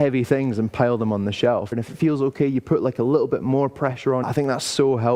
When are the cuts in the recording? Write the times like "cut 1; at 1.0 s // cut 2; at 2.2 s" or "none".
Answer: cut 1; at 1.7 s // cut 2; at 4.2 s